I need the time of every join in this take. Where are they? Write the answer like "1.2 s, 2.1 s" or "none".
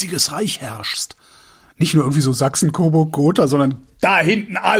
none